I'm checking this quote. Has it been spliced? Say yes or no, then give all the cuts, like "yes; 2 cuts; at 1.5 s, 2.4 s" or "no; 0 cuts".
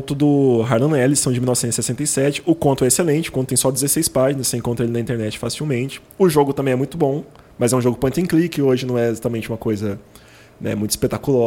no; 0 cuts